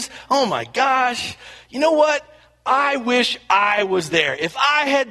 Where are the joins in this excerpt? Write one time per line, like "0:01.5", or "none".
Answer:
none